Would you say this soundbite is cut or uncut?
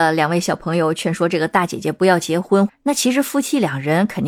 cut